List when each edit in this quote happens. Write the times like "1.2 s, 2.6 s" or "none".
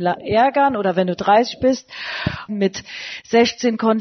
2.5 s